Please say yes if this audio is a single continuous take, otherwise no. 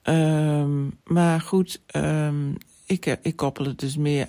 no